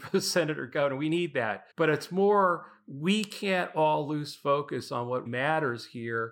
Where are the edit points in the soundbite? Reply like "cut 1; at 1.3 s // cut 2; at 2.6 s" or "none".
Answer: cut 1; at 1.7 s // cut 2; at 5.3 s